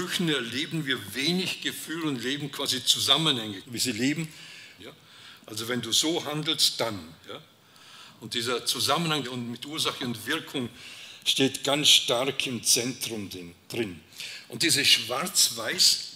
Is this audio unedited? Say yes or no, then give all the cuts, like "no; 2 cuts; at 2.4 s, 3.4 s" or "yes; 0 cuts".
no; 3 cuts; at 3.6 s, 4.8 s, 9.2 s